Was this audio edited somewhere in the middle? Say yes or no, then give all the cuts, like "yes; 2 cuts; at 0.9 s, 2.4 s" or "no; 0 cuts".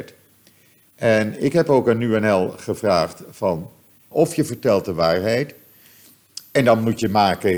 yes; 1 cut; at 4.1 s